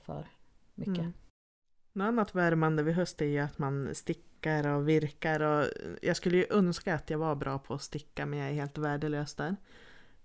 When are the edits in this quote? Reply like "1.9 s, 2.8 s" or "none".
none